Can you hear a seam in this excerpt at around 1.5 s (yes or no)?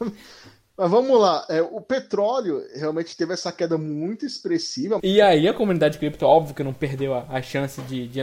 no